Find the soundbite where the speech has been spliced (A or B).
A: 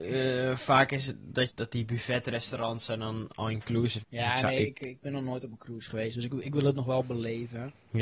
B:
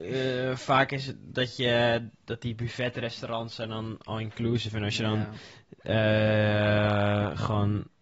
A